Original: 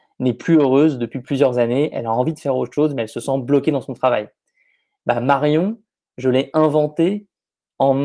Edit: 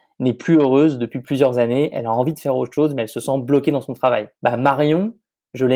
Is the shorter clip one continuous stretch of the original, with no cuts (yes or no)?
no